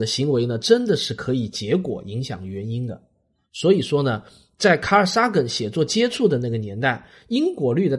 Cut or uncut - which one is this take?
uncut